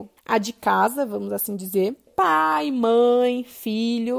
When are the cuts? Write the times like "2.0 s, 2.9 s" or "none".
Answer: none